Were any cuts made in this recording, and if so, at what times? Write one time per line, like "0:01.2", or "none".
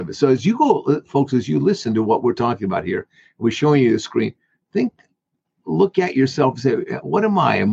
none